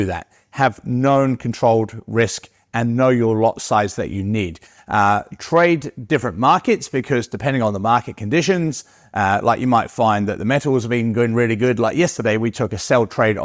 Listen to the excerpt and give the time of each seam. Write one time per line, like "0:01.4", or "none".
none